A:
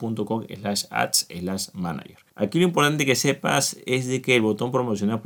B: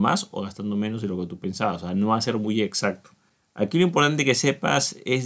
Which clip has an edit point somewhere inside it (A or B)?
A